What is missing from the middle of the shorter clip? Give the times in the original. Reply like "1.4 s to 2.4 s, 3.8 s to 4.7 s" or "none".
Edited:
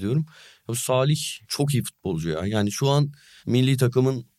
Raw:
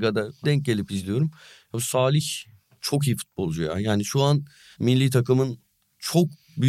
2.5 s to 2.8 s